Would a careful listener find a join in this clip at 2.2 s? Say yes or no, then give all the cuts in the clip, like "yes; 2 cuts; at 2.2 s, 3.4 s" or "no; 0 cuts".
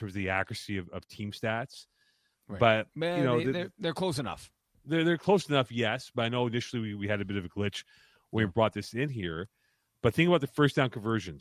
no; 0 cuts